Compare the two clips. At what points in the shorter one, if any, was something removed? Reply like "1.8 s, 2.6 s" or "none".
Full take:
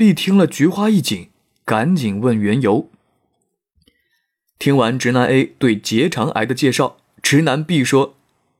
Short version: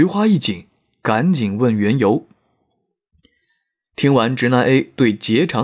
none